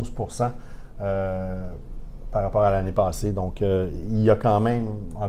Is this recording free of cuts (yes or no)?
yes